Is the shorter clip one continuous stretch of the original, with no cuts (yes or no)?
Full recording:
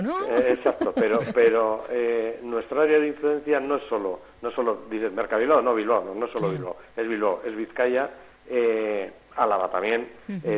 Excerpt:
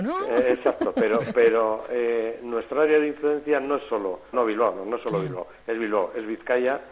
no